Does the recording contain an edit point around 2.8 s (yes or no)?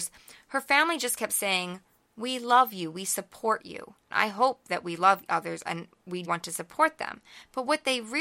no